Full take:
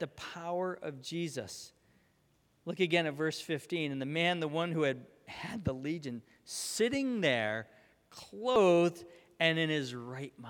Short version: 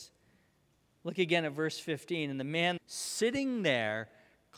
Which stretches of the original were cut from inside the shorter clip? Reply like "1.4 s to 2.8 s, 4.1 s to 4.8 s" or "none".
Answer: 4.4 s to 6.4 s